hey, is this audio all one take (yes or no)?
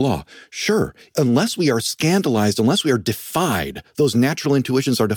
yes